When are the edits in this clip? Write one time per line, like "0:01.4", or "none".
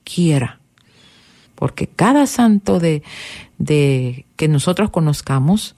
0:01.5